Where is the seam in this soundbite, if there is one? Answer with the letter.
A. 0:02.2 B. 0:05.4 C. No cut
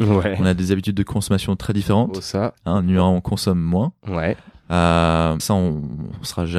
B